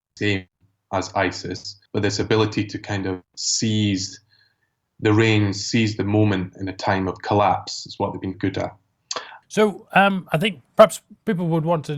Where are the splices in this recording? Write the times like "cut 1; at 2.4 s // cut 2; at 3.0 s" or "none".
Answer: cut 1; at 1.9 s // cut 2; at 8.3 s // cut 3; at 9.4 s